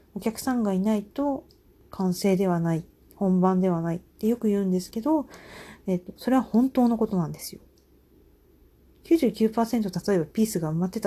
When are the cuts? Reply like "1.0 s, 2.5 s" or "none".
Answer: none